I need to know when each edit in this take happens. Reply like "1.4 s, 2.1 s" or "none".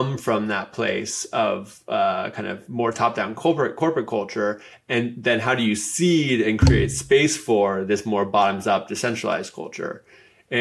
none

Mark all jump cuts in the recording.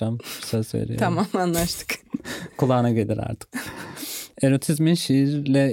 none

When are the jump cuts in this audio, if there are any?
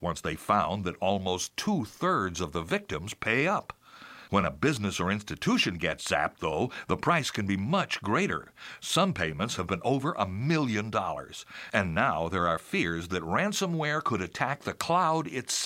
4.3 s

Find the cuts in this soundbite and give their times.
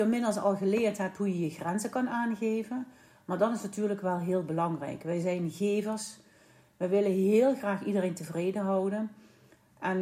none

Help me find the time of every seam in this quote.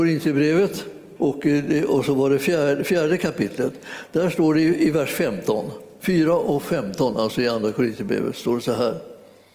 1.2 s

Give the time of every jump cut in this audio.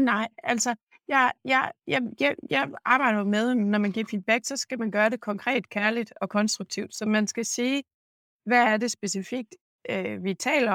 none

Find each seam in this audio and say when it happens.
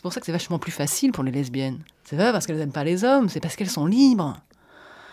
1.9 s

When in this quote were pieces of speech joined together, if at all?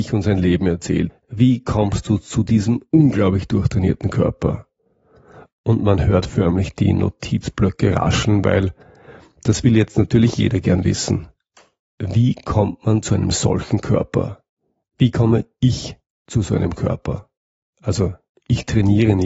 1.1 s, 17.7 s

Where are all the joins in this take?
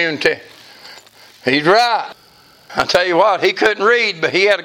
none

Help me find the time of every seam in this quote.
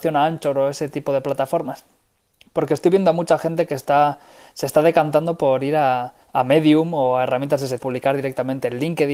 6.2 s, 7.8 s

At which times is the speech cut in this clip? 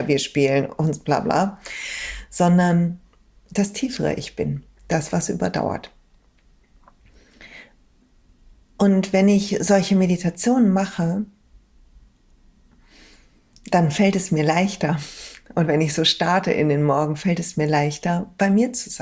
none

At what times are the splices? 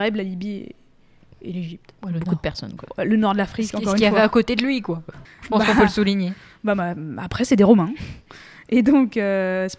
5.3 s

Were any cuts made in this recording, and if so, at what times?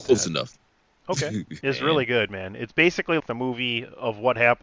1.6 s, 3.2 s

